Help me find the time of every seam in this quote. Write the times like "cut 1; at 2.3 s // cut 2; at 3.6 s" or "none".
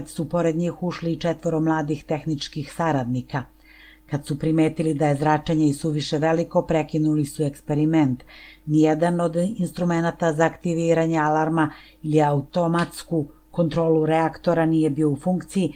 none